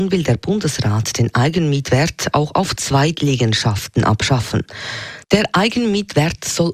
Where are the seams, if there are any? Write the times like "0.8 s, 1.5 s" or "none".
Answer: 5.2 s